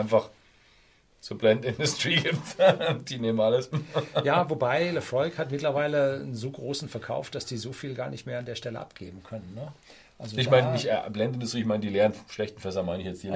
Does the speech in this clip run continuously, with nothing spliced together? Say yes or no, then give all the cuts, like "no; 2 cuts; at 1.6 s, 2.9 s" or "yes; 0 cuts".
yes; 0 cuts